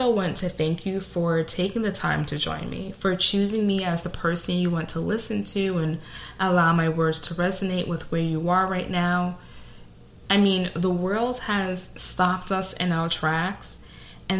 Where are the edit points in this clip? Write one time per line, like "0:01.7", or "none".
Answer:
0:10.3